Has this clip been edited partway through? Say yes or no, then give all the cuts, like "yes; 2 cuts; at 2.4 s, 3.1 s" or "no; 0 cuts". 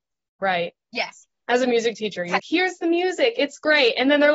yes; 1 cut; at 2.4 s